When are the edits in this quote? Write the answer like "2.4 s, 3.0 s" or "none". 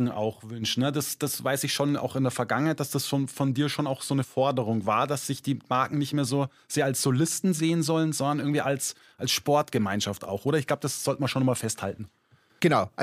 none